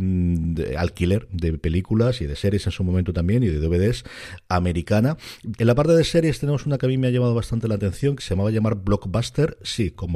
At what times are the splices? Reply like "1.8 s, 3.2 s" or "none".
5.6 s, 8.2 s